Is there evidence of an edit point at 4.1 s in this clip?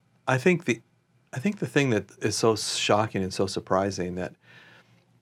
no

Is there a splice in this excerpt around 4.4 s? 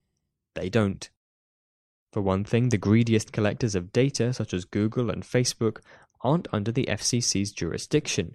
no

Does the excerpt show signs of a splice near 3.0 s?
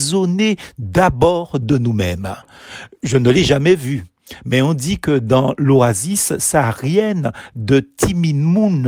no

